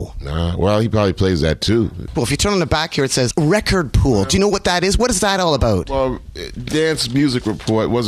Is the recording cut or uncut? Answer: cut